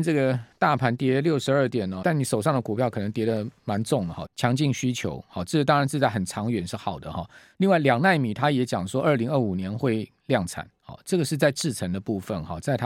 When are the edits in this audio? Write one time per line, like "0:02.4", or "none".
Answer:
0:02.0
0:04.2